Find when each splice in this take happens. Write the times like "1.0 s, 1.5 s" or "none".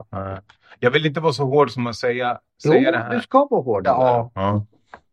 3.8 s